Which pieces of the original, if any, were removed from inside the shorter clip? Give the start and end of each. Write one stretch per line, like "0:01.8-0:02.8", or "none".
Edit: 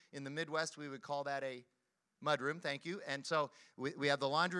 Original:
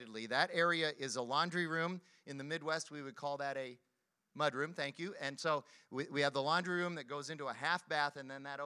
none